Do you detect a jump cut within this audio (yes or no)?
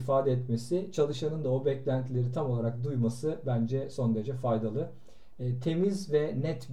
no